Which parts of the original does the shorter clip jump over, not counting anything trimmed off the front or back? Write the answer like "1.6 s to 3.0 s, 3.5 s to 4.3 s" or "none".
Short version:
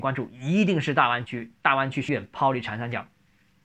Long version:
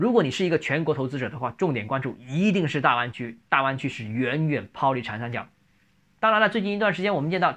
4.0 s to 4.5 s